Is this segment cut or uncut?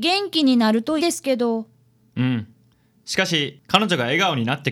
cut